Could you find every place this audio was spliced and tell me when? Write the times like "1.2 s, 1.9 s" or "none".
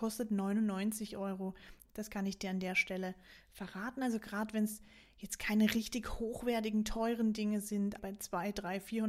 1.8 s, 8.0 s